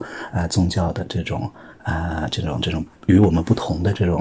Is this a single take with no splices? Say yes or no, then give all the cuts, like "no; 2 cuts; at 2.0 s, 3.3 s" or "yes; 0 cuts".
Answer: yes; 0 cuts